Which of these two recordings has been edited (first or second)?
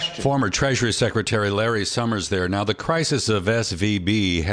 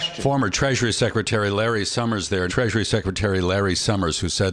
second